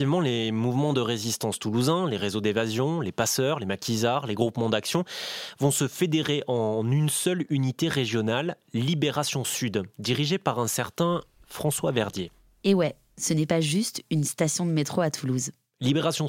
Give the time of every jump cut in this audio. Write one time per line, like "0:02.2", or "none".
none